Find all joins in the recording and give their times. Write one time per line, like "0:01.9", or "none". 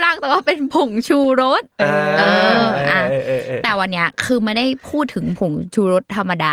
none